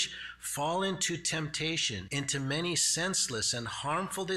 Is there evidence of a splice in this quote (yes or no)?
yes